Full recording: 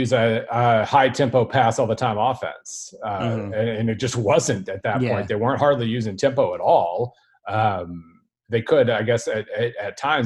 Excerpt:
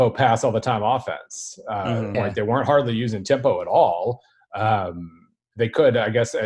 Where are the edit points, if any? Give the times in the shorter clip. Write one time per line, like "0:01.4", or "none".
0:02.1